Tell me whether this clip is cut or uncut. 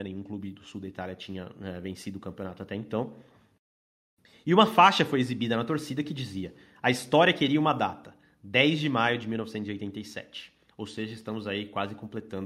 uncut